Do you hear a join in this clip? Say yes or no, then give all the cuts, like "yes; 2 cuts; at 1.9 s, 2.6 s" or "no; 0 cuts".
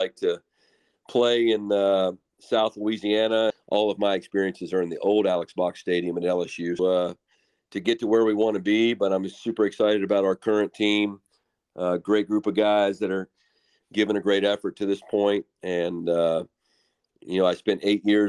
yes; 2 cuts; at 3.5 s, 6.8 s